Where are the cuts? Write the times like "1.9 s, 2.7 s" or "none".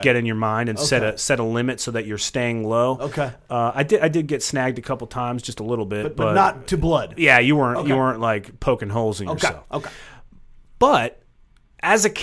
none